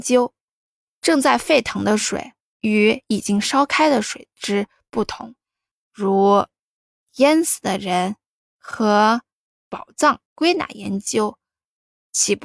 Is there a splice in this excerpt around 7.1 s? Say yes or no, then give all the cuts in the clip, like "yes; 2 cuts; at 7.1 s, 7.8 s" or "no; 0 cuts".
no; 3 cuts; at 0.9 s, 5.7 s, 10.3 s